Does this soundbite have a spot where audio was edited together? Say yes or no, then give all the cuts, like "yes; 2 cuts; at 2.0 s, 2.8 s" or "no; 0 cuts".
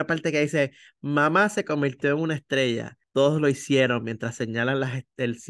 no; 0 cuts